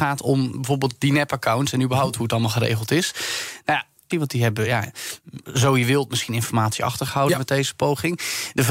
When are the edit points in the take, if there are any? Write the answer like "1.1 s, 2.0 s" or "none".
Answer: 4.1 s

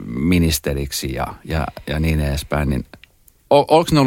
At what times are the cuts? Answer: none

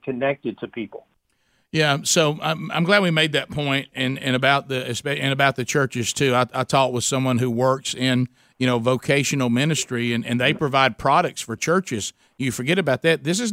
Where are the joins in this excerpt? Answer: none

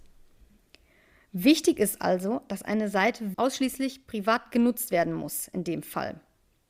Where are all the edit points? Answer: 3.3 s

